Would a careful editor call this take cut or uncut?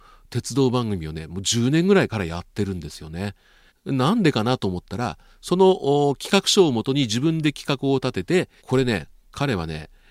cut